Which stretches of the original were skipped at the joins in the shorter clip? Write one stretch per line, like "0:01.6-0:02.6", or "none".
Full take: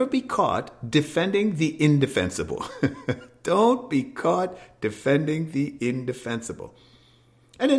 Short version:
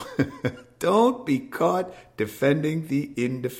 none

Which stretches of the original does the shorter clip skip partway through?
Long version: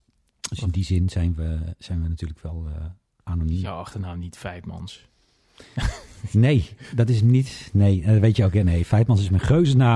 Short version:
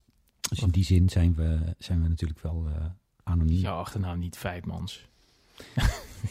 none

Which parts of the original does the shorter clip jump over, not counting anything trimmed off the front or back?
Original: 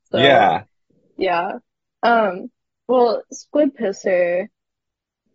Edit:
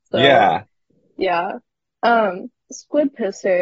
0:02.7-0:03.3

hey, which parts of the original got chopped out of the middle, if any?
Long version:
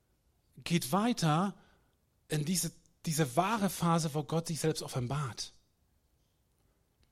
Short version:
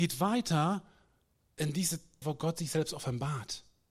0:02.9-0:04.1

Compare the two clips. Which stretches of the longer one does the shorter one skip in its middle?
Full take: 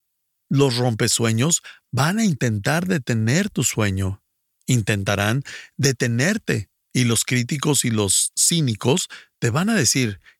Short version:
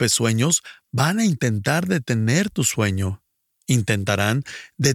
none

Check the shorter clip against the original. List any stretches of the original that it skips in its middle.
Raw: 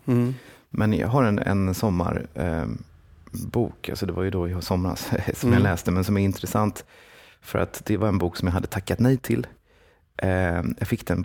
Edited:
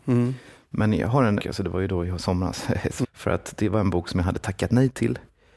0:01.4-0:03.8
0:05.5-0:07.3

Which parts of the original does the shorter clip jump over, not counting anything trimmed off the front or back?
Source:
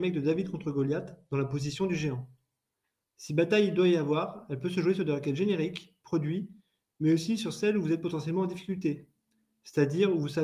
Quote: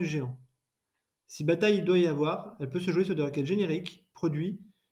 none

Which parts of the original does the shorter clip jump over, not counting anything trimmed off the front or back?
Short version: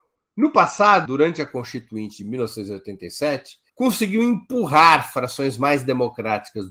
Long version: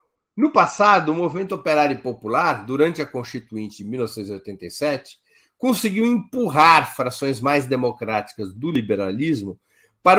0:01.1-0:02.7
0:05.3-0:05.5

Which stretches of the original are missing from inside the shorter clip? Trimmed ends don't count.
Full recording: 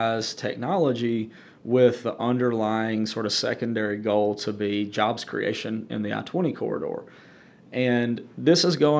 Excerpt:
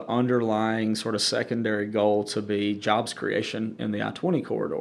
none

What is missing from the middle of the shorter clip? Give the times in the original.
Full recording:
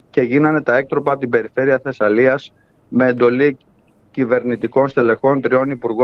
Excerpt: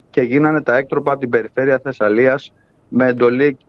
none

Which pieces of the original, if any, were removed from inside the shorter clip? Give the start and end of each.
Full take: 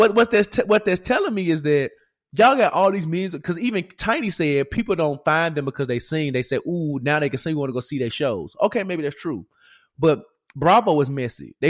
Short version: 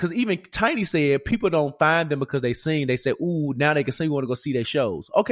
none

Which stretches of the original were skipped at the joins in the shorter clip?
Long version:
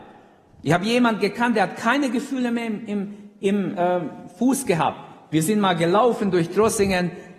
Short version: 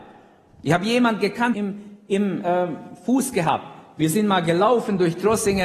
0:01.5-0:02.9

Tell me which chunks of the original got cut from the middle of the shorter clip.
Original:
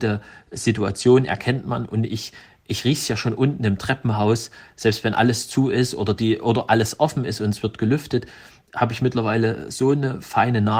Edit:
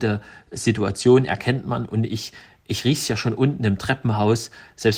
none

